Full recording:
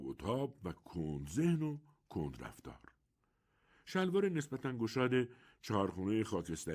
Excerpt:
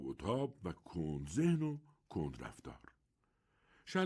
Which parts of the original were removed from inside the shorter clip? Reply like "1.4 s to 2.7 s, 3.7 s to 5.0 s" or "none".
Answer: none